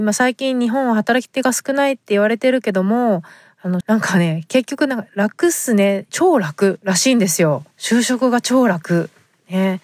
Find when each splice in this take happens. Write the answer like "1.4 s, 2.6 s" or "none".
3.8 s, 6.1 s, 7.7 s